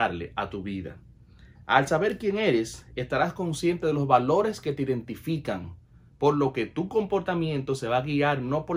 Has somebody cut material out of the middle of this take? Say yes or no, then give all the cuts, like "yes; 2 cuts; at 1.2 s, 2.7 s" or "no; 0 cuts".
yes; 1 cut; at 6.1 s